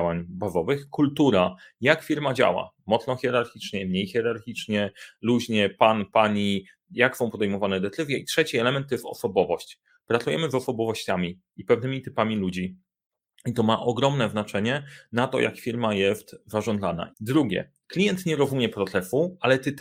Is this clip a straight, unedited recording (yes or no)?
no